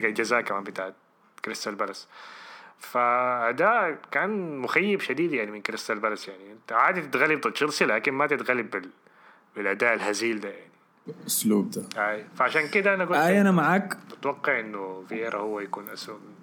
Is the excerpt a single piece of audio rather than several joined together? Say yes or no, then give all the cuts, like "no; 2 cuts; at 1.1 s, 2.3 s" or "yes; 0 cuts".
yes; 0 cuts